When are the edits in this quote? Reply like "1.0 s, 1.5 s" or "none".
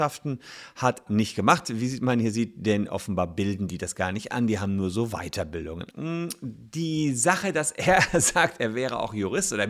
1.1 s, 5.9 s